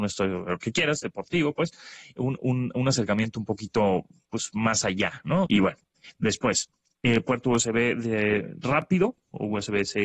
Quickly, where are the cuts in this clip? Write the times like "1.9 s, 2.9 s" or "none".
5.5 s